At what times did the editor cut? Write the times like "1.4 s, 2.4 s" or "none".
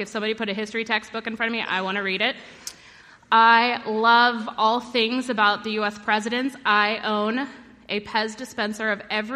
none